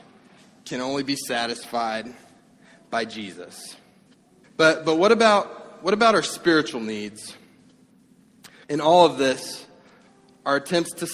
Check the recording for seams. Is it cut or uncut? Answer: cut